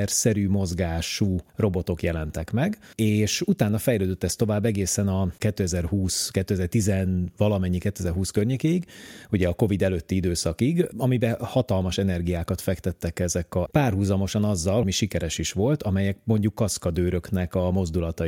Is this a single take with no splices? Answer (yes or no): no